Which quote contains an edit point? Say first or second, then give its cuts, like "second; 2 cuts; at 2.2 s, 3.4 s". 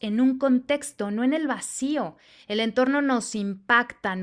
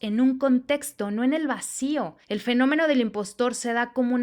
second; 1 cut; at 2.2 s